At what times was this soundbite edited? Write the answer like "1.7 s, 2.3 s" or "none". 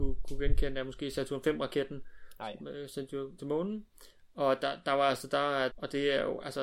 3.4 s, 5.7 s